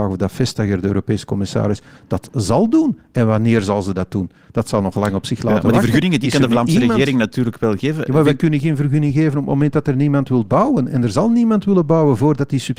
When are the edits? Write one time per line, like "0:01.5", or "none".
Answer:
none